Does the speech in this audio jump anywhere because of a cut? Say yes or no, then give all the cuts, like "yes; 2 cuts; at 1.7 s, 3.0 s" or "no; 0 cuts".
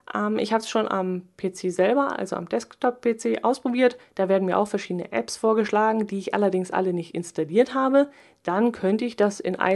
no; 0 cuts